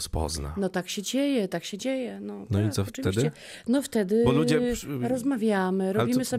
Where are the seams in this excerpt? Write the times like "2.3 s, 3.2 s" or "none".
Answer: none